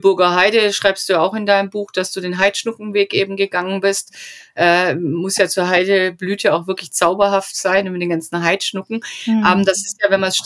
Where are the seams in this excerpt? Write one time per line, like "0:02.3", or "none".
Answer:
none